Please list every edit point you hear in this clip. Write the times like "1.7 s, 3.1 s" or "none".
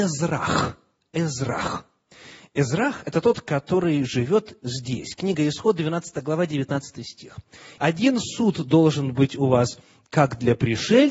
7.8 s